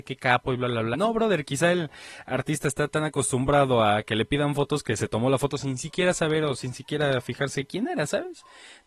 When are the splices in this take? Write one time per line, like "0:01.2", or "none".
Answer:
0:00.9